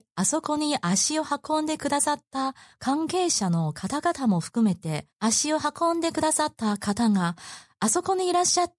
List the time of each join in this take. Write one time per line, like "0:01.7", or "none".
0:05.1